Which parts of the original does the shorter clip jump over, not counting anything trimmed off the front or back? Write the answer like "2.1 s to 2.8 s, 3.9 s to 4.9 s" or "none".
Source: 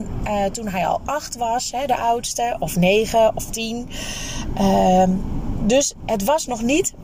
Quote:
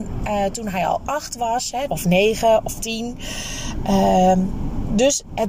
1.9 s to 2.6 s